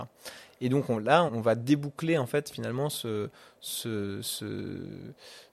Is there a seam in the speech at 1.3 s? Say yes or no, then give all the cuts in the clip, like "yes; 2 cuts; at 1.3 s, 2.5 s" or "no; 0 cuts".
yes; 1 cut; at 1.3 s